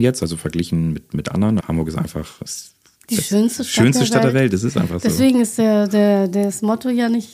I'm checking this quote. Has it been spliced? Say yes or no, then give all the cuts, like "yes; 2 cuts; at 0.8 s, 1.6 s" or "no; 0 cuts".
yes; 1 cut; at 1.6 s